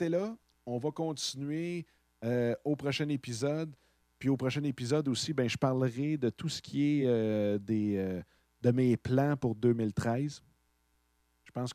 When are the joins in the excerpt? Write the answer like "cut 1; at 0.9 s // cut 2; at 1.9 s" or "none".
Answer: none